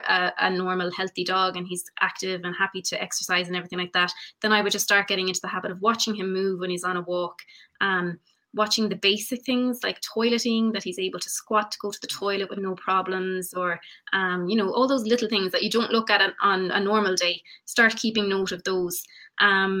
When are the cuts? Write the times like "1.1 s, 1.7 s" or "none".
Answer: none